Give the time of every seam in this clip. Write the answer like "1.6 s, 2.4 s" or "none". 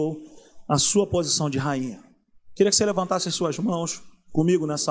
none